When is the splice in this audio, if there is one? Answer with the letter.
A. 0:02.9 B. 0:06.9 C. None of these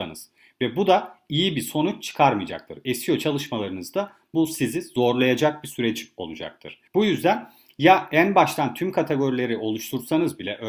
B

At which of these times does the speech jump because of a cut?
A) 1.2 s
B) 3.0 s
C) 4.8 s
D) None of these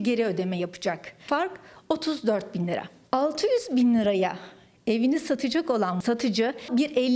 D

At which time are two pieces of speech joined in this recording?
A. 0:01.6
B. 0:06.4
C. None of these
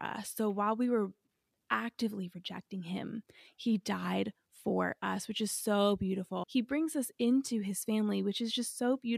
B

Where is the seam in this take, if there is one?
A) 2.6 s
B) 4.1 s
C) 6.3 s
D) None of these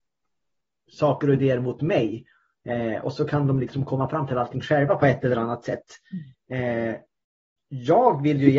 C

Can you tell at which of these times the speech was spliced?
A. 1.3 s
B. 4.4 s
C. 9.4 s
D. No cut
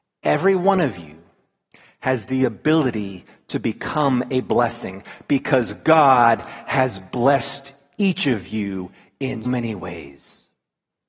C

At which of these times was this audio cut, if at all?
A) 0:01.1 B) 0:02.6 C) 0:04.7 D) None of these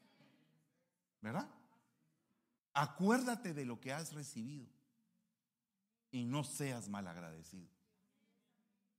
B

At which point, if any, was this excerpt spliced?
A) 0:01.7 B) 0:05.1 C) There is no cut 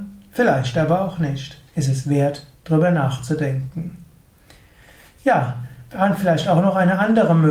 A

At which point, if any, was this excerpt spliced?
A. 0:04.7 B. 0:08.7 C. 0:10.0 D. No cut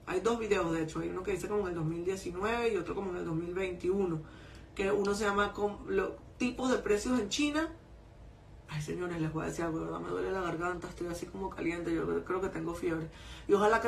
B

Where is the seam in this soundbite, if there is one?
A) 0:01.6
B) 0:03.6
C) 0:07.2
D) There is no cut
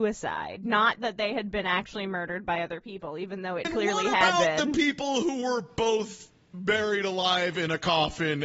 B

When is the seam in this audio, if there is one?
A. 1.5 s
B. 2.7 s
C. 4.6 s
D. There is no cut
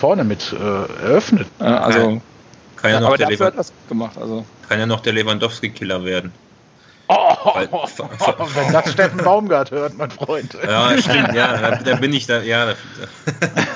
A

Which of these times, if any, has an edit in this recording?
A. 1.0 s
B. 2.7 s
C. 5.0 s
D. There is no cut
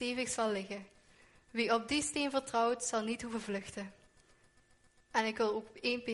D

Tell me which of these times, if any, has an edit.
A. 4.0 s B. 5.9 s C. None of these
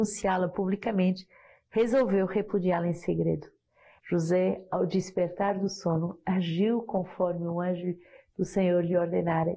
A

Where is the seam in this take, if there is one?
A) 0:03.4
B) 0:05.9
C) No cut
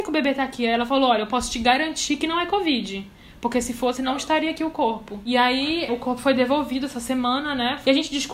B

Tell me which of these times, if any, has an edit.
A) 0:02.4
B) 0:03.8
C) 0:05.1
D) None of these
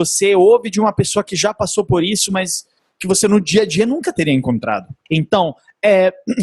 C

